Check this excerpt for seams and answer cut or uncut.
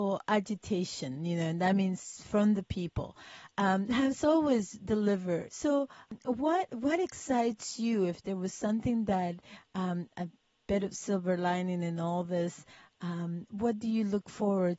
cut